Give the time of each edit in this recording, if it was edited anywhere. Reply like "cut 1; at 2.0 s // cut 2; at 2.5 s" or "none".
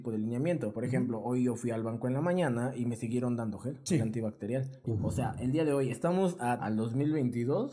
cut 1; at 4.8 s // cut 2; at 6.6 s

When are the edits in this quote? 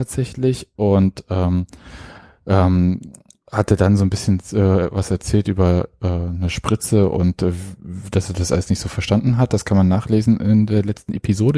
none

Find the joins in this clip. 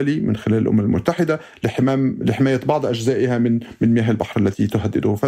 none

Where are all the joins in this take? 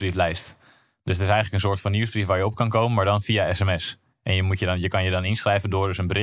none

